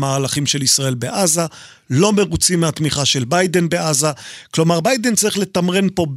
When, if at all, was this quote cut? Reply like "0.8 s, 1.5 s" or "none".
none